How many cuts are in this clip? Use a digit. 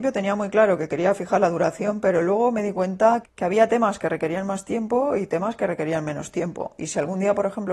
1